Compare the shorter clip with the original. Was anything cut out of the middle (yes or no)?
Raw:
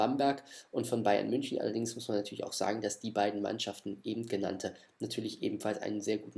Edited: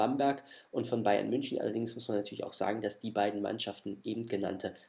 no